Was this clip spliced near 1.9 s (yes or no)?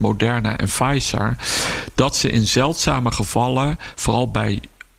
no